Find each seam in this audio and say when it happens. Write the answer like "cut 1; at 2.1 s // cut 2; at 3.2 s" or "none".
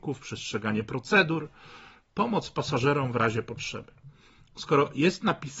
none